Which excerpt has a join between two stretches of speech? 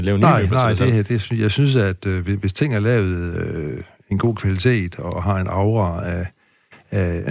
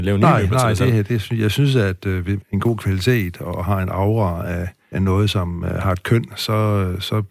second; 2 cuts; at 2.4 s, 4.9 s

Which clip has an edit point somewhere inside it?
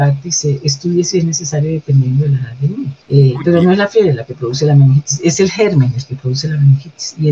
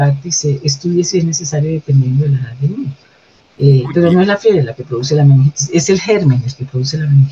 first; 1 cut; at 3.0 s

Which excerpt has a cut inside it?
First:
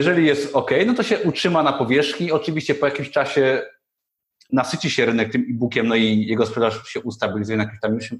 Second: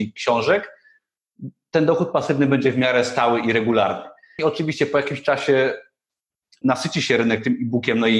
second; 1 cut; at 4.4 s

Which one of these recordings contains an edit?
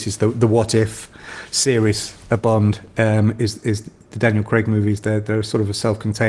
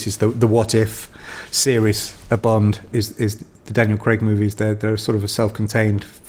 second; 1 cut; at 2.9 s

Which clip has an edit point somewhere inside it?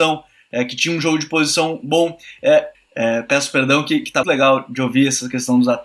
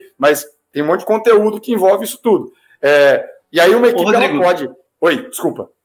first; 2 cuts; at 2.7 s, 4.2 s

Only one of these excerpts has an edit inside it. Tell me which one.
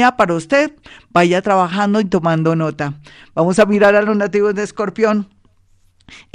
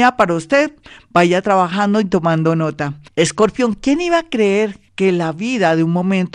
second; 2 cuts; at 3.1 s, 4.9 s

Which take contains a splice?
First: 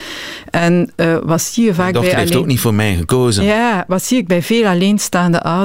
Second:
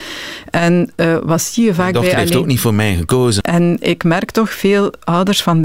second; 1 cut; at 3.4 s

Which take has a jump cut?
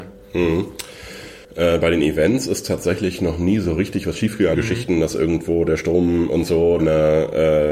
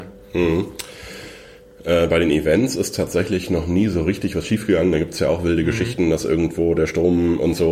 first; 3 cuts; at 1.4 s, 4.5 s, 6.8 s

